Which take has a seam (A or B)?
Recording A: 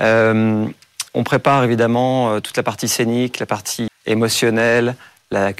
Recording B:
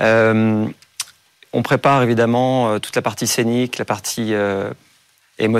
A